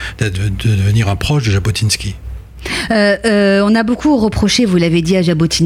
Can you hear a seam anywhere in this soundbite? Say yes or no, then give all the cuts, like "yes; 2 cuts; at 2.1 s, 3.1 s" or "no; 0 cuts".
no; 0 cuts